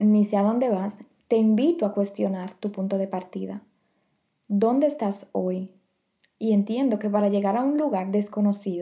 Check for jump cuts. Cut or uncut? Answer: cut